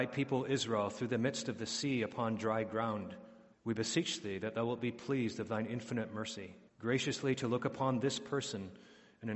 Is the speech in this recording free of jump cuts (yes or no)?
no